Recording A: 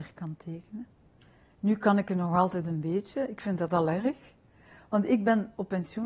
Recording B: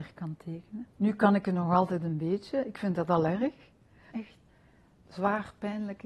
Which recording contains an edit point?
B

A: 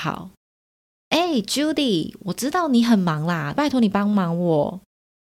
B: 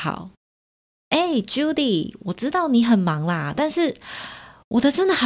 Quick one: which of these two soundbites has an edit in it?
A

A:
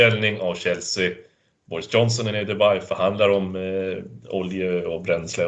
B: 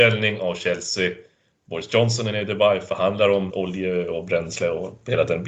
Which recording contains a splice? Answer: B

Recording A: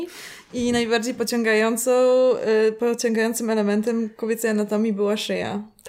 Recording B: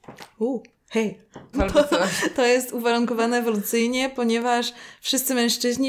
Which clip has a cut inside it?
B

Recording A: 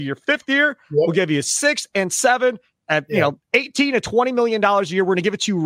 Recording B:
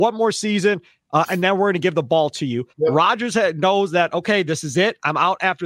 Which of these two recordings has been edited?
B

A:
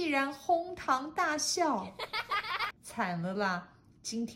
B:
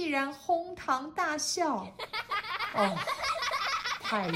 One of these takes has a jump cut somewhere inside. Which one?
A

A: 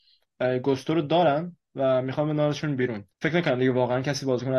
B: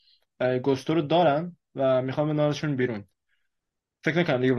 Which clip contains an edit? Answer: A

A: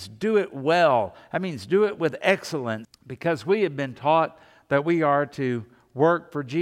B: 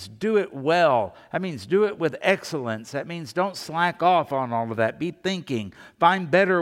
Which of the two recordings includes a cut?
A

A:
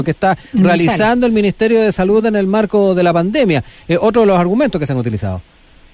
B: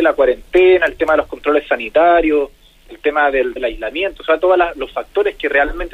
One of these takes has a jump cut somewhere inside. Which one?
B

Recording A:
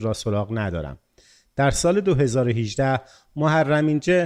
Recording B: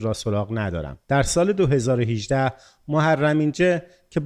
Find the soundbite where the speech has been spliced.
B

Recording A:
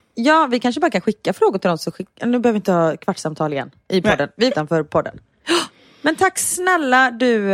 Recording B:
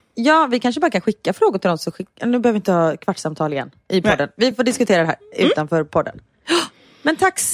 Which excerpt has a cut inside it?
A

